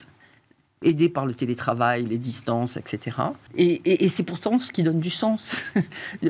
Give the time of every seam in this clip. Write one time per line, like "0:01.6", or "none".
0:03.5